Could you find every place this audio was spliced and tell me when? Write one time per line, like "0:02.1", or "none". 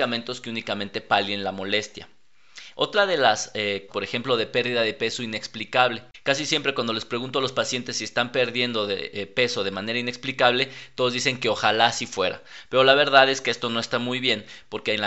0:03.9